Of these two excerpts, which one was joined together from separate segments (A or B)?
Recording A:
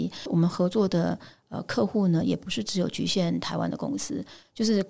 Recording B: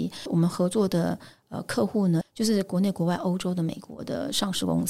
B